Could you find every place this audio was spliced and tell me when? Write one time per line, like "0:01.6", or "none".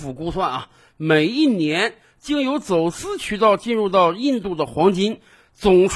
none

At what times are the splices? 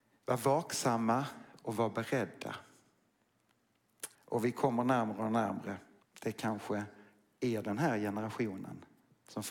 0:04.1
0:06.0

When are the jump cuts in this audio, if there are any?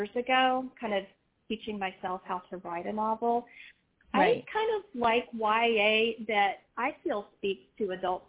none

